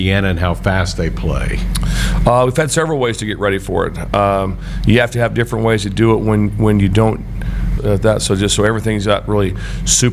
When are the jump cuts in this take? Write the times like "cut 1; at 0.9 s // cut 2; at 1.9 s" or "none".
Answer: cut 1; at 7.8 s